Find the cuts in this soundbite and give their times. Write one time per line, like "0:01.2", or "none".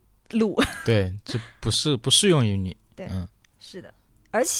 none

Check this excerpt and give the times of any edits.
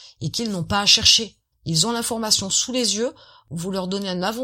0:01.5

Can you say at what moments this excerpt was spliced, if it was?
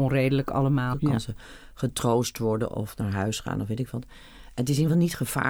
0:00.9

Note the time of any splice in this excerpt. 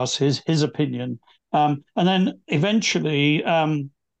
0:01.4

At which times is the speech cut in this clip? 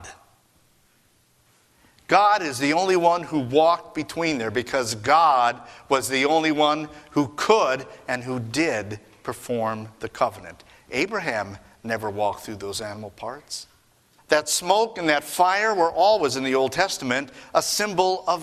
0:14.2

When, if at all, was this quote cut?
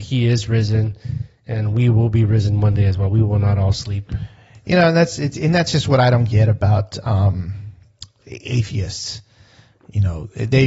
0:08.2

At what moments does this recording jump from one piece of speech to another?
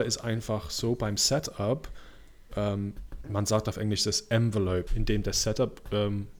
0:03.2
0:04.9

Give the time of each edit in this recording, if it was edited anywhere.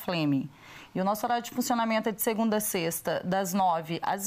none

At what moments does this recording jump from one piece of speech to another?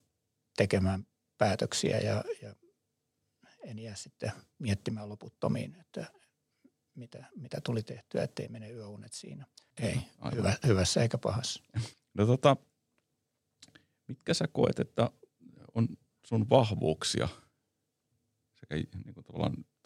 0:09.7
0:11.9

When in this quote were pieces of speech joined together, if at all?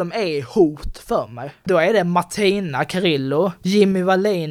none

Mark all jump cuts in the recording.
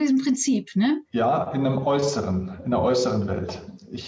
0:01.1

